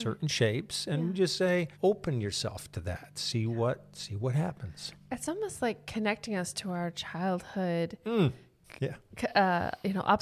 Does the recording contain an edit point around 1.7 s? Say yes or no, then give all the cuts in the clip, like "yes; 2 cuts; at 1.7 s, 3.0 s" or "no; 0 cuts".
yes; 1 cut; at 1.7 s